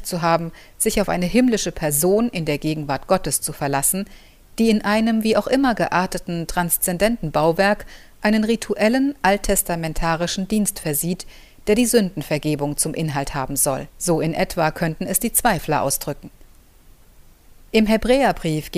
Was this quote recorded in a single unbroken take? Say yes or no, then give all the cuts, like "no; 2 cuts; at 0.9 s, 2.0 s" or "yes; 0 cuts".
no; 1 cut; at 13.9 s